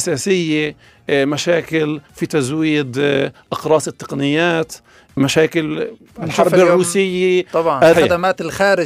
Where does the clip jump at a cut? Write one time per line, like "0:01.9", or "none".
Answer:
0:07.9